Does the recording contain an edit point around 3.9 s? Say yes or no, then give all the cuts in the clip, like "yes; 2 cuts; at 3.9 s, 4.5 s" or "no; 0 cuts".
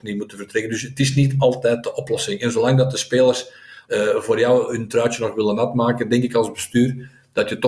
yes; 1 cut; at 3.9 s